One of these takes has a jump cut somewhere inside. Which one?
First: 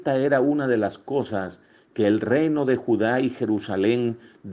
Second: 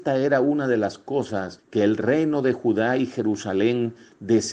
second; 1 cut; at 1.6 s

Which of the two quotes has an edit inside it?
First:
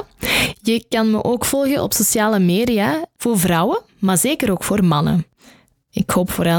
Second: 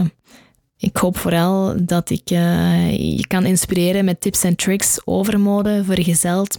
first; 1 cut; at 3.1 s

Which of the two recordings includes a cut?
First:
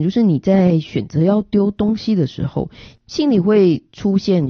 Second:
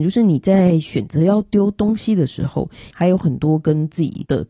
second; 1 cut; at 2.9 s

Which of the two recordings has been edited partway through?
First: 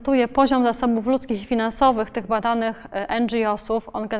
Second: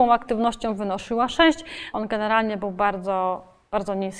second; 1 cut; at 1.9 s

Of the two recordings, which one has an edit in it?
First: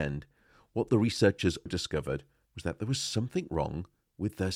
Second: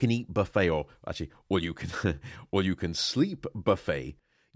first; 1 cut; at 1.7 s

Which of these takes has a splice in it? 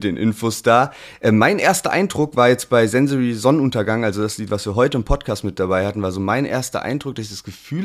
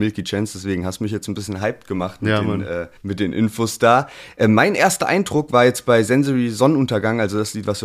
second; 1 cut; at 3.0 s

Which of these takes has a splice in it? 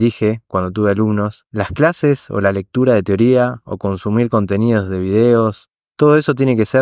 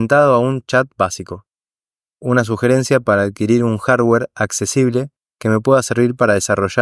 second; 1 cut; at 2.1 s

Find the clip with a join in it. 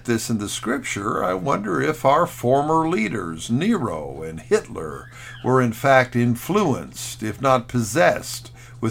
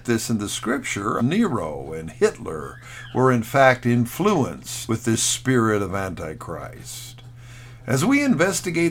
second; 3 cuts; at 1.2 s, 4.9 s, 7.8 s

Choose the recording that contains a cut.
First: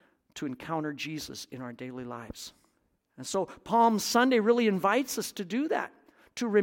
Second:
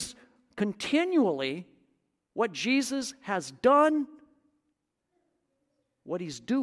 first; 1 cut; at 3.0 s

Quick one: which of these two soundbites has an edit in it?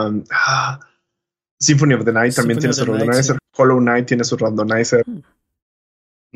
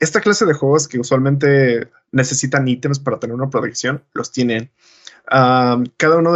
first; 2 cuts; at 3.4 s, 5.0 s

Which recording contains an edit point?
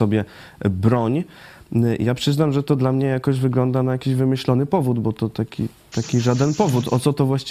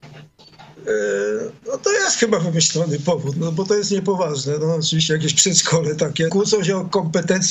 second; 1 cut; at 6.3 s

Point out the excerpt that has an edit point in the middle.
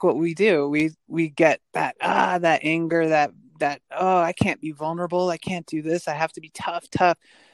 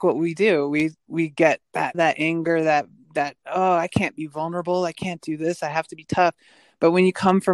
second; 2 cuts; at 1.9 s, 6.1 s

